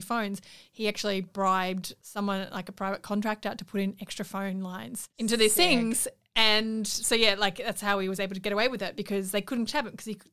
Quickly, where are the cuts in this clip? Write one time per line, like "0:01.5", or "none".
none

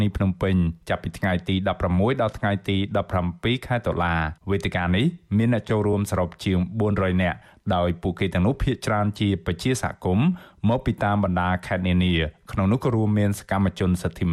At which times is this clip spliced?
0:04.4

